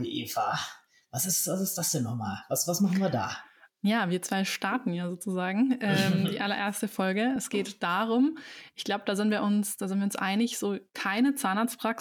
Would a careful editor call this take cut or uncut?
uncut